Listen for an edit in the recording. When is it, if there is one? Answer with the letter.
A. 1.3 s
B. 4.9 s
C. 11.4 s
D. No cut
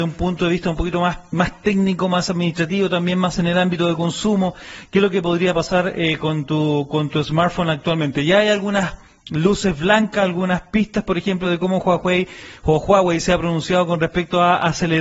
D